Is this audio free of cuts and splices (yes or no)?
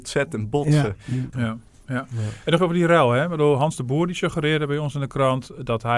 no